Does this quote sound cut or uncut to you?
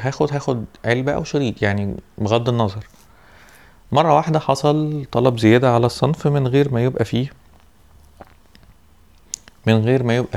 uncut